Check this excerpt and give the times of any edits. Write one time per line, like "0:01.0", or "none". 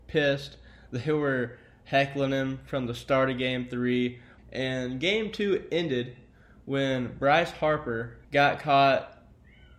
0:04.4
0:08.2

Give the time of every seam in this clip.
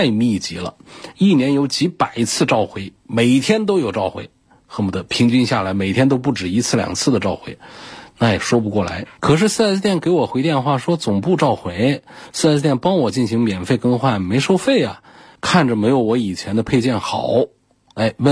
0:09.2
0:15.4

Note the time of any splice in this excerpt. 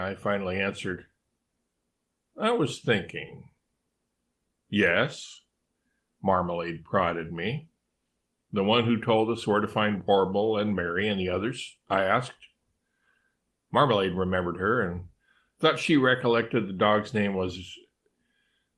0:08.5

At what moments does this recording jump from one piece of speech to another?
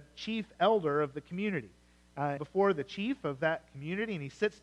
0:02.4

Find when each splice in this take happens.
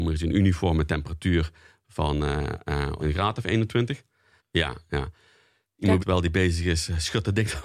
0:03.0
0:04.4
0:06.0

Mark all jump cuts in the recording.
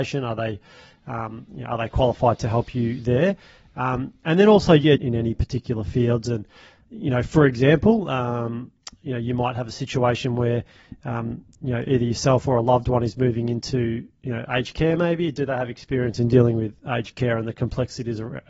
0:05.0

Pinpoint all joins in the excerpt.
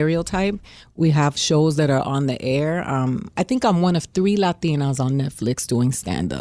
none

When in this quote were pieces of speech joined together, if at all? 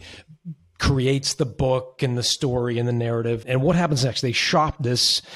0:03.4

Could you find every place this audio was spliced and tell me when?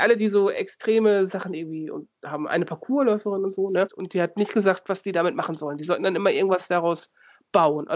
0:03.8

